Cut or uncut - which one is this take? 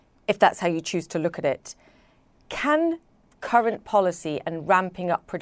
uncut